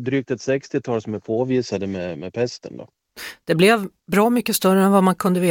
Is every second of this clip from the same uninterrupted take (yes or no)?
yes